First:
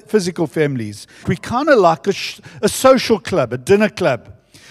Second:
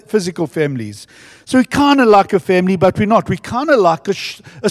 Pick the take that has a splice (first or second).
first